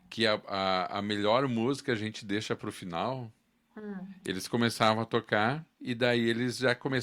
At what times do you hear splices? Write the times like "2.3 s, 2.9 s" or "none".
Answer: 3.7 s, 5.7 s